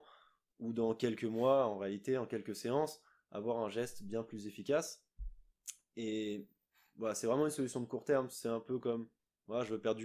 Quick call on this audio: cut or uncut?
uncut